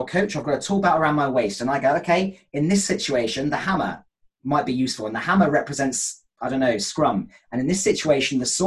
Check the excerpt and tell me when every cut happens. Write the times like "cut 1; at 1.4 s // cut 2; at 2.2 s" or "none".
none